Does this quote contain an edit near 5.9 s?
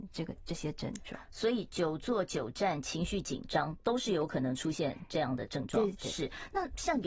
yes; 1 cut; at 5.9 s

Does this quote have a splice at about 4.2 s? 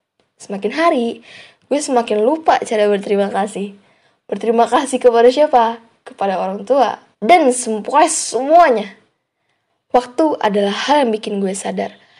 no; 1 cut; at 7.1 s

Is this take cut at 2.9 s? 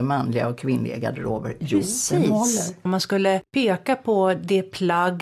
yes; 1 cut; at 2.9 s

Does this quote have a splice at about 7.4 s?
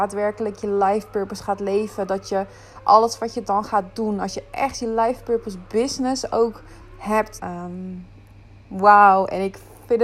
yes; 1 cut; at 7.4 s

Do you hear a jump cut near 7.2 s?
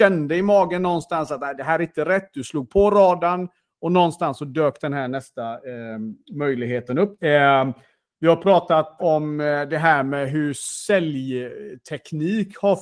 yes; 2 cuts; at 7.2 s, 9.0 s

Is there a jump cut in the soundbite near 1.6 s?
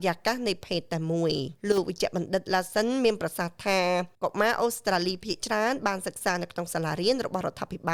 yes; 2 cuts; at 1.6 s, 4.2 s

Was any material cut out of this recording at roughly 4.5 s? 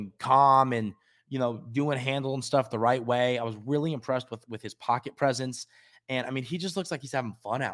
no; 0 cuts

